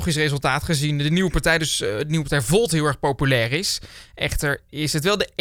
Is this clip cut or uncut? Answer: uncut